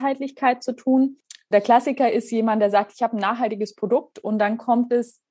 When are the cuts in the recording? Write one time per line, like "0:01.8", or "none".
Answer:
0:01.5